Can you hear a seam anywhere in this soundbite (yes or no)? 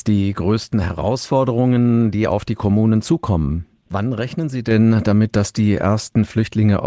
yes